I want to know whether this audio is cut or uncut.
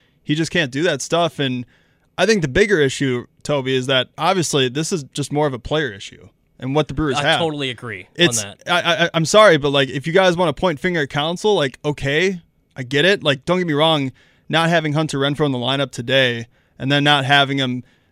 uncut